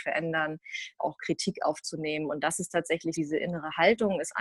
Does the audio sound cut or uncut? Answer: cut